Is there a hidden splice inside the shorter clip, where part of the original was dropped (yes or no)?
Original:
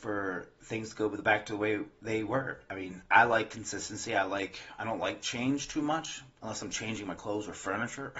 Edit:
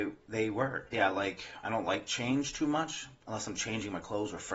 yes